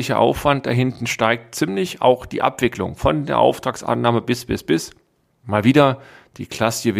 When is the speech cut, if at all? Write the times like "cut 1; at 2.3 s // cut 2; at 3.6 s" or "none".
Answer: cut 1; at 5.4 s